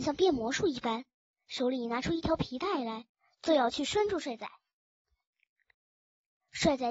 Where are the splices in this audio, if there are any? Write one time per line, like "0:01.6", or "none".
none